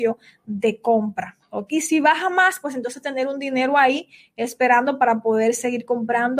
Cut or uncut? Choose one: cut